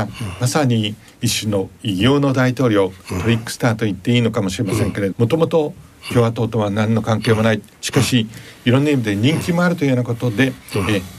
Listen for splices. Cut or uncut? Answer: cut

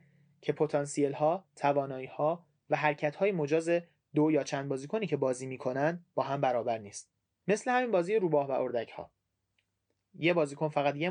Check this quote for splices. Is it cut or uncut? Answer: uncut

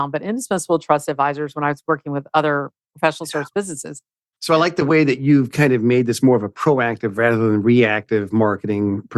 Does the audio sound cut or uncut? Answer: cut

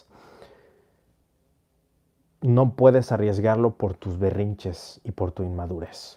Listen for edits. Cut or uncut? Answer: cut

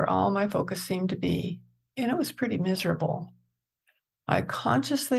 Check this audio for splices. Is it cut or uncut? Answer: uncut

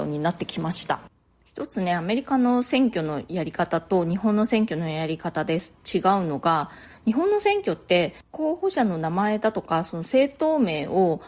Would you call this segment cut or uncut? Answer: uncut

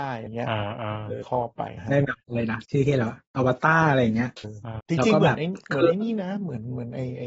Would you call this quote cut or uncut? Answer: cut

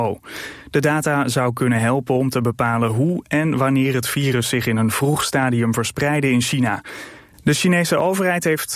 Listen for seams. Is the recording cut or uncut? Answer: cut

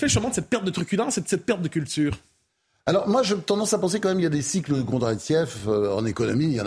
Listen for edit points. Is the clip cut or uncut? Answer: uncut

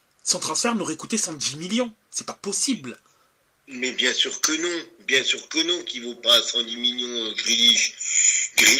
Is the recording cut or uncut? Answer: uncut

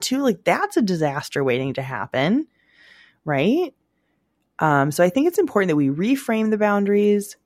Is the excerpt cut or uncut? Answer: uncut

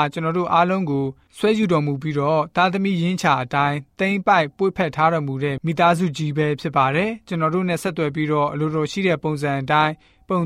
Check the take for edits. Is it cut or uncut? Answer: uncut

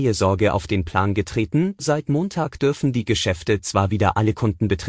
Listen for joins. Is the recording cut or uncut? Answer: uncut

